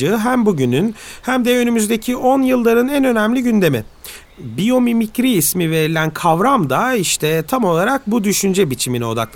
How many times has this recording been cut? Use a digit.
1